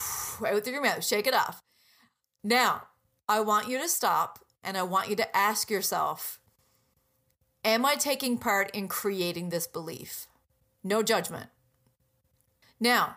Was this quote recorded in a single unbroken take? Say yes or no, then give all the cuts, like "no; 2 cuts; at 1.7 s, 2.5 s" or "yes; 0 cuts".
no; 1 cut; at 10.8 s